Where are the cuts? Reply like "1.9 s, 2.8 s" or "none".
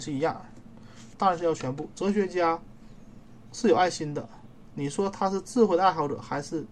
1.1 s